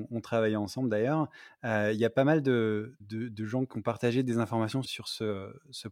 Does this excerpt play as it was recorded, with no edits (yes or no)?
no